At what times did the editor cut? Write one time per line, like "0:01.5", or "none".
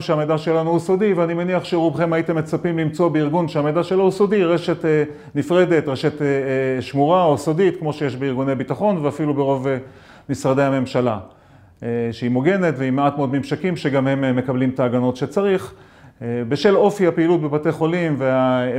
none